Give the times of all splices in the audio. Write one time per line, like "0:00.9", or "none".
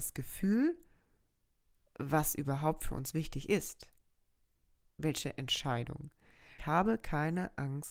0:06.6